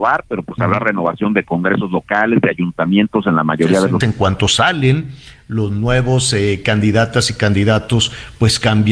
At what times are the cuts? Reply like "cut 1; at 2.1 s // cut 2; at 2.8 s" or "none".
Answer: cut 1; at 4.0 s